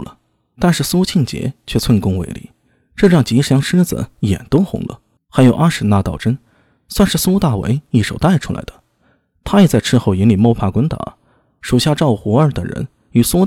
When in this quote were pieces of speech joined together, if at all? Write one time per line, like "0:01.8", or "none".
0:05.2